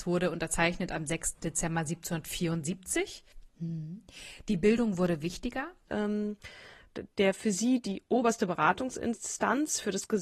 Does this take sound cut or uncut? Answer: cut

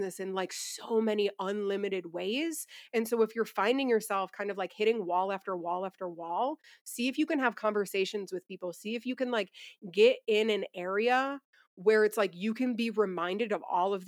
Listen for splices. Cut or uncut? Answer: uncut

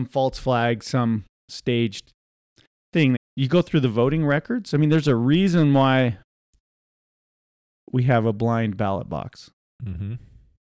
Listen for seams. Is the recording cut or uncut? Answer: cut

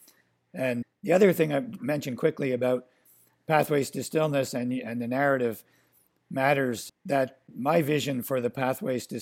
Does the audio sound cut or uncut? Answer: uncut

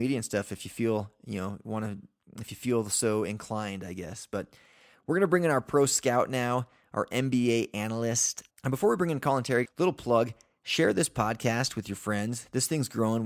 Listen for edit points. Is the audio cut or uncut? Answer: cut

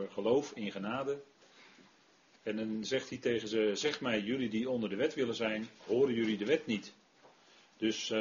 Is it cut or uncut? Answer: cut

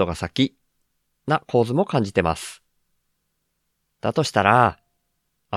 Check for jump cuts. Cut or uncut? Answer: uncut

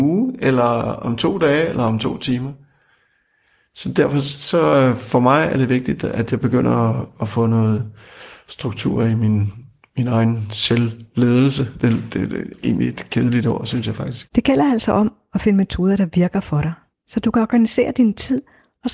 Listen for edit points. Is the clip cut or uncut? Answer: uncut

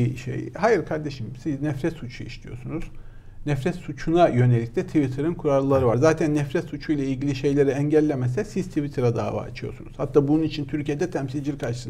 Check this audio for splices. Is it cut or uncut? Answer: uncut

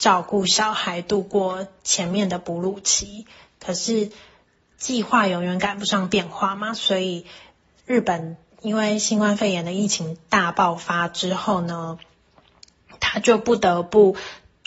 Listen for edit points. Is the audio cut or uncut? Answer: uncut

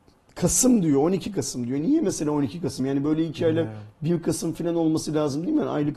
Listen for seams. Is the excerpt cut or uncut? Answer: uncut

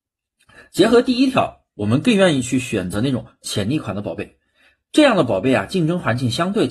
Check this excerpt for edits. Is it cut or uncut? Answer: uncut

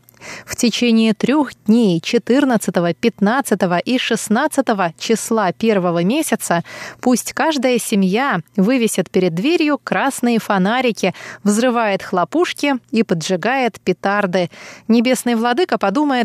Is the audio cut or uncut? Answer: uncut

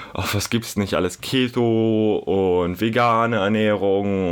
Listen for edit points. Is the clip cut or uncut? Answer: uncut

